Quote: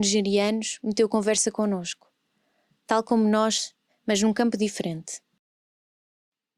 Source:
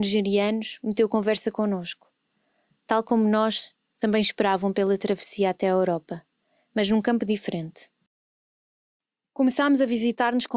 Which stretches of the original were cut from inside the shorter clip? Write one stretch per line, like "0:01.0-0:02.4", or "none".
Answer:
0:03.9-0:06.6